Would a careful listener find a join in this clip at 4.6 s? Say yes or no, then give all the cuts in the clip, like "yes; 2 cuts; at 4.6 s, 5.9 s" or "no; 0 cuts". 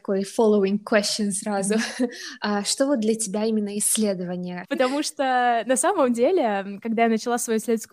yes; 1 cut; at 4.6 s